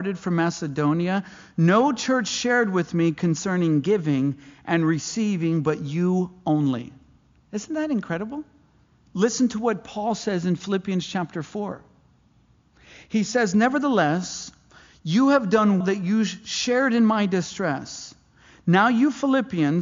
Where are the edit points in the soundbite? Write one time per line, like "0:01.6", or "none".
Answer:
0:09.0
0:15.8

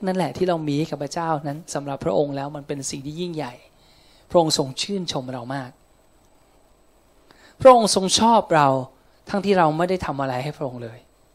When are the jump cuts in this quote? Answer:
0:09.4

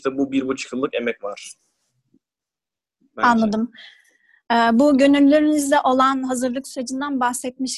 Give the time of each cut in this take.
none

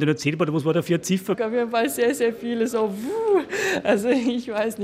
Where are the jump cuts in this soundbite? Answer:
0:01.3

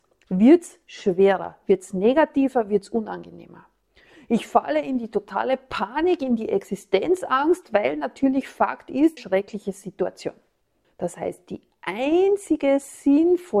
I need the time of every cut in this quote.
0:09.2
0:10.8

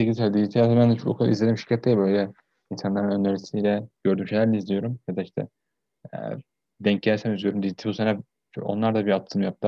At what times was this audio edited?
none

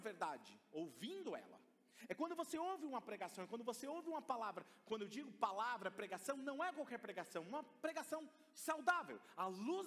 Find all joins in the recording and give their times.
none

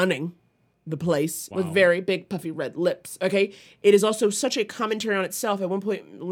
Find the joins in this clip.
0:01.5

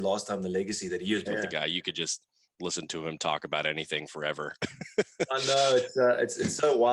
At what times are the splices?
0:01.3

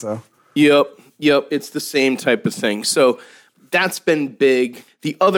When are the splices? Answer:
none

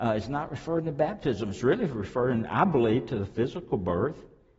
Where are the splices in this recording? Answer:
none

